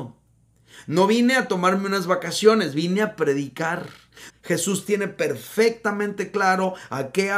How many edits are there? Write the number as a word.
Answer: one